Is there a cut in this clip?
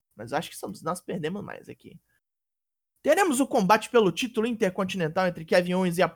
no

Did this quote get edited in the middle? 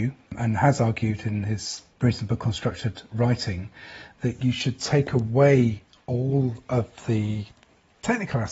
yes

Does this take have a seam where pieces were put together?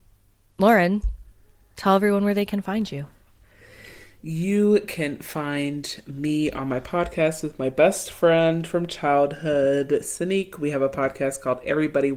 no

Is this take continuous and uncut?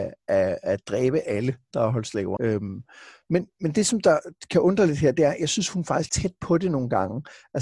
no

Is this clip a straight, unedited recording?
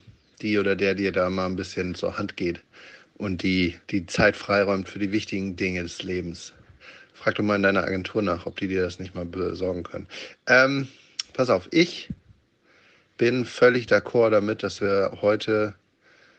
no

